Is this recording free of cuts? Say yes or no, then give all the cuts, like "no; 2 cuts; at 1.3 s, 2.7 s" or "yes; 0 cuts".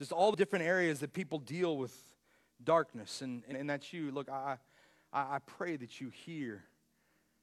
no; 1 cut; at 3.5 s